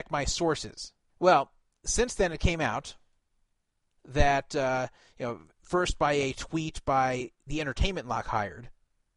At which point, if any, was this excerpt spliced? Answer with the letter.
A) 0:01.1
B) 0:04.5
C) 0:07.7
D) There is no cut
A